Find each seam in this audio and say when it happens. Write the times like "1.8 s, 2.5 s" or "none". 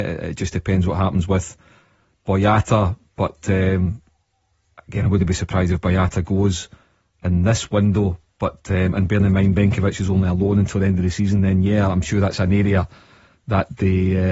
none